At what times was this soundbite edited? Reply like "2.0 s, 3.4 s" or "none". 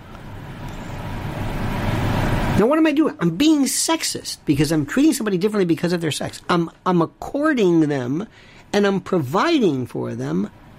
none

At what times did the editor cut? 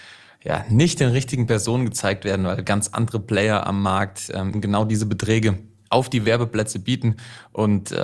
4.5 s

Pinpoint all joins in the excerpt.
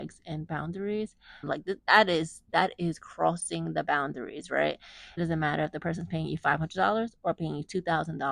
1.4 s, 5.2 s

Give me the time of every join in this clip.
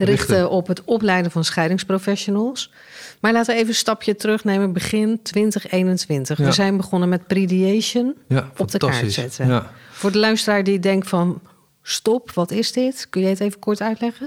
none

